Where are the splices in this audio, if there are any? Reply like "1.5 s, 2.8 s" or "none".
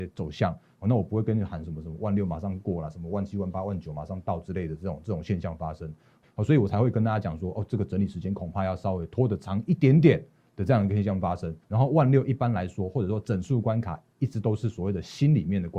6.2 s, 11.6 s